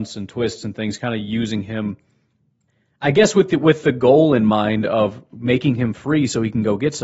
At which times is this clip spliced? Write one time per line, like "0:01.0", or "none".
none